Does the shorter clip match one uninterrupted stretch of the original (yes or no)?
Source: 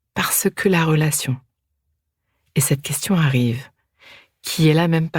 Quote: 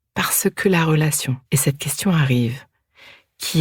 no